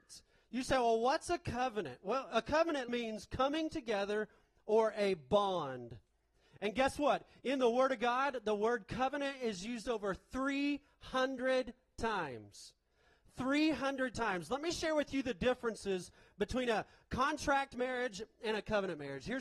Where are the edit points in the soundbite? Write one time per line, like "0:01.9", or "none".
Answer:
0:02.9